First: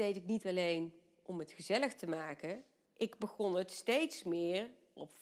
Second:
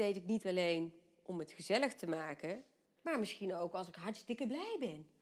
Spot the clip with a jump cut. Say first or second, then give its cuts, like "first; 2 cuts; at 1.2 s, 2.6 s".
second; 1 cut; at 3.0 s